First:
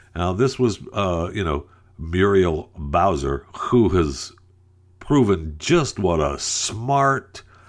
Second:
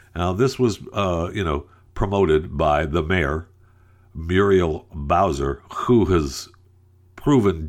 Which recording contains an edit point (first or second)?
first